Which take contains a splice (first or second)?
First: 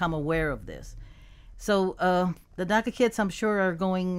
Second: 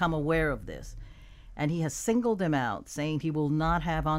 first